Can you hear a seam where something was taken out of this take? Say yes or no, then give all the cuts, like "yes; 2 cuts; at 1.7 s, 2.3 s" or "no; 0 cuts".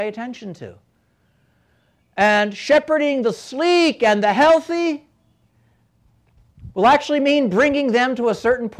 no; 0 cuts